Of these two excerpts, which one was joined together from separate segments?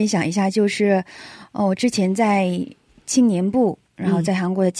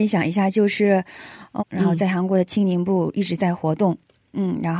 second; 1 cut; at 1.6 s

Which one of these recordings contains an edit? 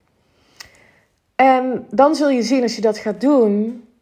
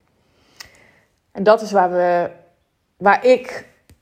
second; 1 cut; at 1.3 s

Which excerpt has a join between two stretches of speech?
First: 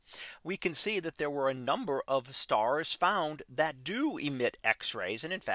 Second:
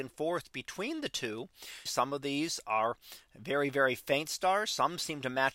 second; 1 cut; at 1.9 s

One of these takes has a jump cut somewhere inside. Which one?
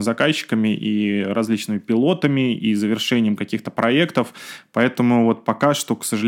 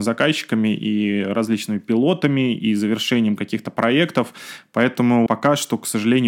second; 1 cut; at 5.3 s

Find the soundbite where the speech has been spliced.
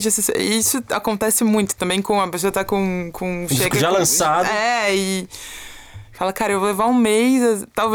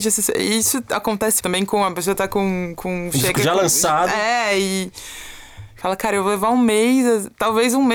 second; 1 cut; at 1.4 s

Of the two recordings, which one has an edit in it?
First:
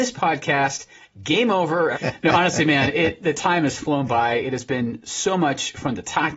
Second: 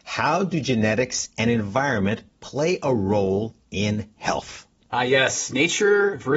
first; 1 cut; at 1.9 s

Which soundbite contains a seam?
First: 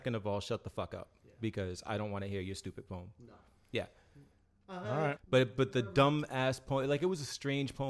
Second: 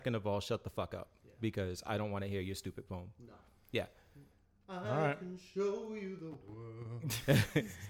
first; 1 cut; at 5.2 s

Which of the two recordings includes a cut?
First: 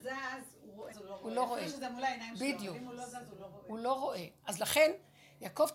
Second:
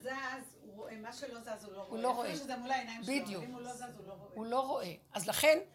first; 1 cut; at 0.9 s

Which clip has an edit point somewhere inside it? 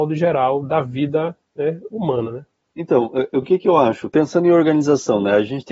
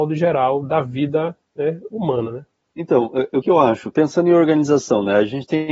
second; 1 cut; at 3.4 s

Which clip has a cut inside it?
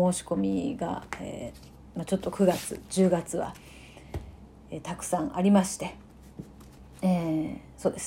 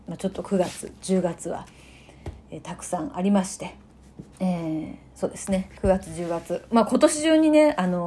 second; 2 cuts; at 2.4 s, 4.3 s

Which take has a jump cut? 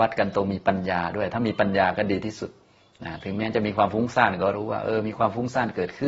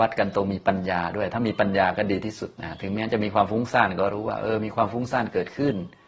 second; 1 cut; at 2.5 s

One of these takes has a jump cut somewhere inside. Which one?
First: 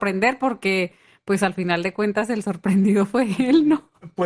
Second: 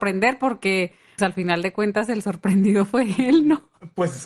second; 1 cut; at 1.2 s

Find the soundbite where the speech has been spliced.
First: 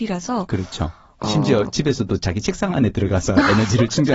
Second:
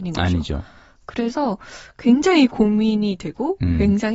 first; 1 cut; at 1.2 s

